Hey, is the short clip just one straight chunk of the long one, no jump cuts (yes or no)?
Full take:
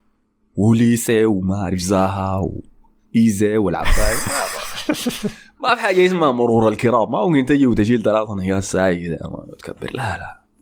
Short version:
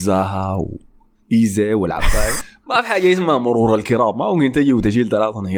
no